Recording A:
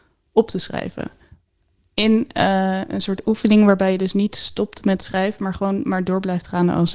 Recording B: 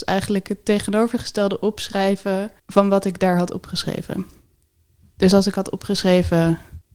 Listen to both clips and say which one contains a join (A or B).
B